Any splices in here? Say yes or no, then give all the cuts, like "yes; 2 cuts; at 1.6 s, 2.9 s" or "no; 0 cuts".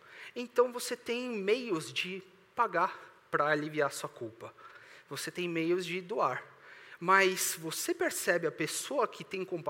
yes; 1 cut; at 7.0 s